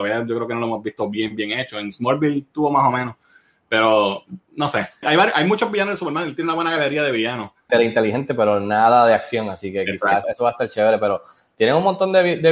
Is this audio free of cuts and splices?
no; 3 cuts; at 5.0 s, 7.7 s, 10.2 s

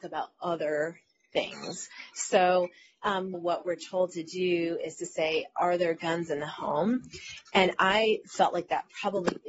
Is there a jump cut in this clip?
yes; 1 cut; at 3.3 s

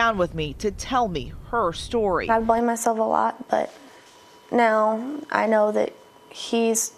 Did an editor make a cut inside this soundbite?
no; 0 cuts

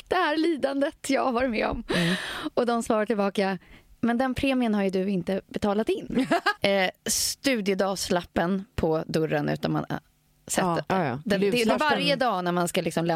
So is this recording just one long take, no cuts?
no; 2 cuts; at 6.6 s, 10.9 s

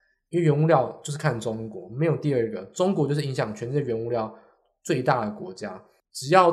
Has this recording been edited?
no; 0 cuts

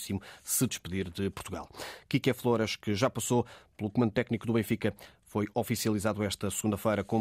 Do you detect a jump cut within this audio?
no; 0 cuts

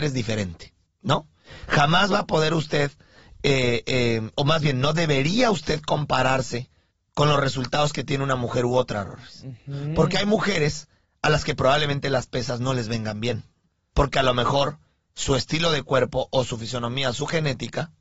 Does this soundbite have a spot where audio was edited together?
no; 0 cuts

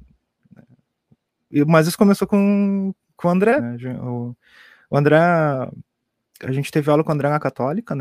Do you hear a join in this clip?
yes; 1 cut; at 3.6 s

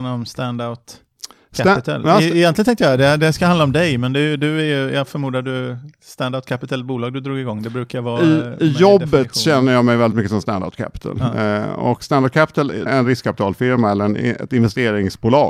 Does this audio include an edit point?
yes; 1 cut; at 12.9 s

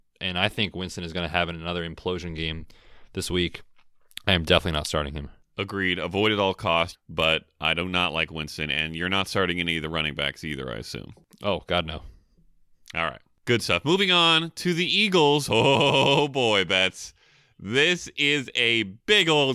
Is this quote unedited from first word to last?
no; 1 cut; at 6.9 s

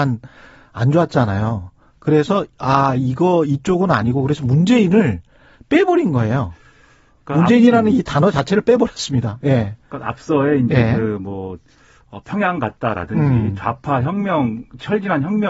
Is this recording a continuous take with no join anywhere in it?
yes; 0 cuts

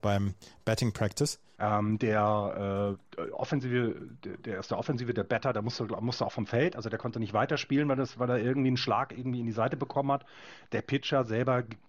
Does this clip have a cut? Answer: yes; 1 cut; at 1.6 s

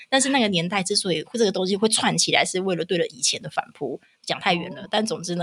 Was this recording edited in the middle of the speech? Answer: no; 0 cuts

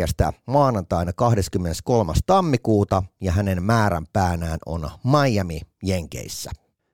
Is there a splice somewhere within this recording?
no; 0 cuts

